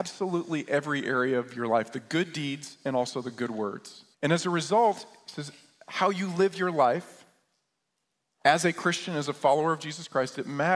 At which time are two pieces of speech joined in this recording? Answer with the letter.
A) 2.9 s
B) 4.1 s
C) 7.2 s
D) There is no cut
B